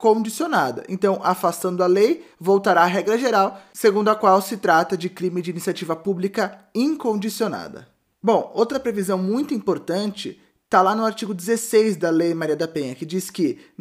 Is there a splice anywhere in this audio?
no; 0 cuts

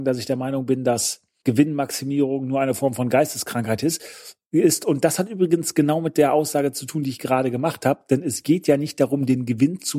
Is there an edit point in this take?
no; 0 cuts

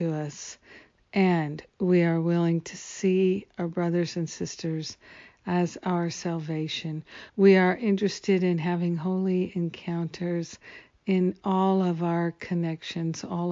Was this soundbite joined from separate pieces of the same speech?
yes; 1 cut; at 7.3 s

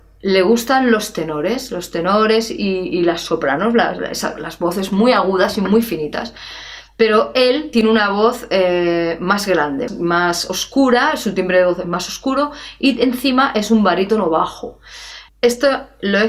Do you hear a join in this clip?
yes; 2 cuts; at 9.9 s, 15.3 s

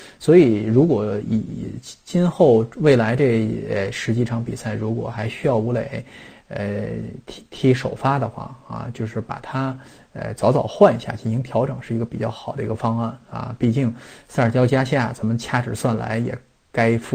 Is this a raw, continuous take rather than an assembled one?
yes; 0 cuts

